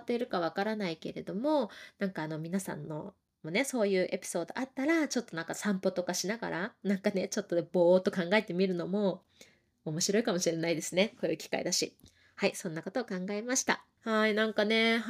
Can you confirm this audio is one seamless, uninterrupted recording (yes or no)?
no